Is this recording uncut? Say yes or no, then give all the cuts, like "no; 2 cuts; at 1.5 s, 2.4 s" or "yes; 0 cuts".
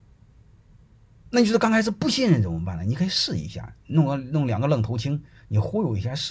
yes; 0 cuts